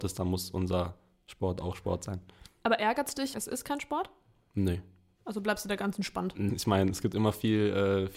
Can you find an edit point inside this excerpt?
yes; 2 cuts; at 3.3 s, 6.5 s

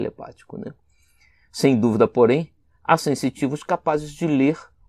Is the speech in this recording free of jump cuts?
yes; 0 cuts

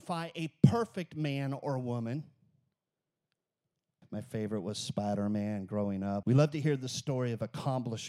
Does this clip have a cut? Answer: yes; 2 cuts; at 4.0 s, 6.2 s

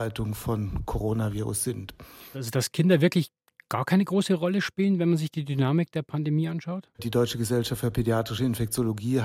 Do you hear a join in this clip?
yes; 2 cuts; at 2.3 s, 6.9 s

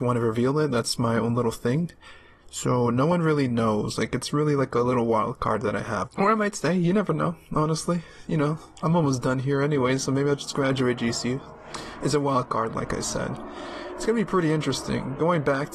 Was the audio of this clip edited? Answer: yes; 1 cut; at 6.1 s

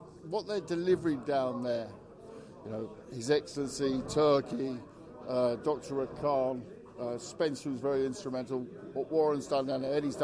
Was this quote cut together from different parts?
no; 0 cuts

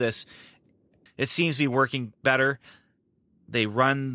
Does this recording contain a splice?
yes; 1 cut; at 1.1 s

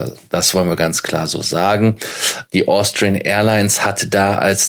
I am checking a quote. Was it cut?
yes; 1 cut; at 2.5 s

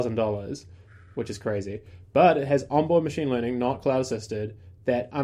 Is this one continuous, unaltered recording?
yes; 0 cuts

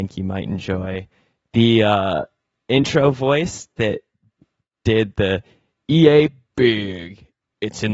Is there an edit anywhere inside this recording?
no; 0 cuts

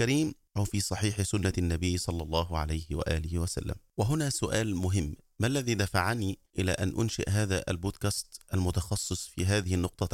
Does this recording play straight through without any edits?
yes; 0 cuts

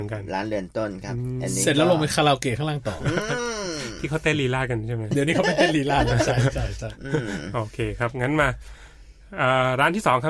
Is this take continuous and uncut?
yes; 0 cuts

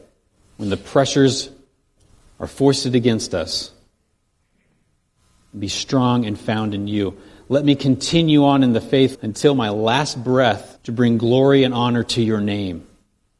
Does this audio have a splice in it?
yes; 2 cuts; at 9.1 s, 10.8 s

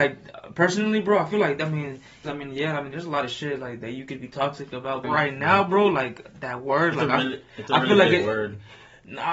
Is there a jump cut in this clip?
yes; 2 cuts; at 2.2 s, 5.0 s

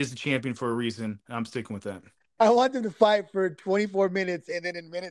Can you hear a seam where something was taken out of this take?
yes; 1 cut; at 2.4 s

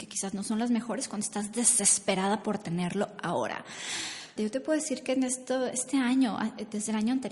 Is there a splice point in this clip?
yes; 1 cut; at 4.4 s

